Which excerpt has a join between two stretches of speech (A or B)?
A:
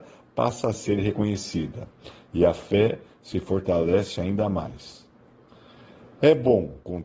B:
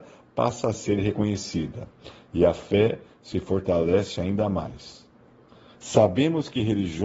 B